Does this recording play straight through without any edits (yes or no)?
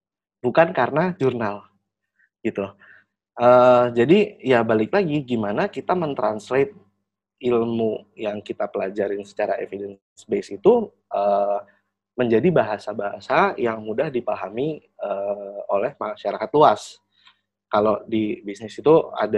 yes